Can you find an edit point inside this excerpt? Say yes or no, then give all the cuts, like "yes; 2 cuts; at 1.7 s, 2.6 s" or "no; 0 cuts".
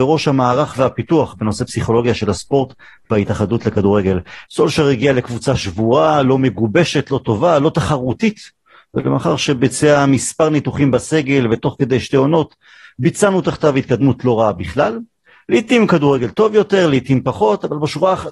yes; 1 cut; at 4.4 s